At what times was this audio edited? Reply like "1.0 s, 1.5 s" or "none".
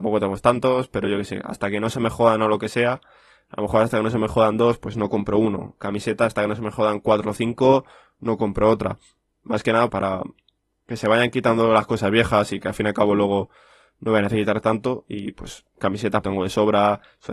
9.9 s, 16.2 s